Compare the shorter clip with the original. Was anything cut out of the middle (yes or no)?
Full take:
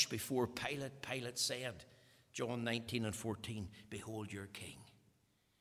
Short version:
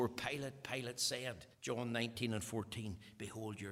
yes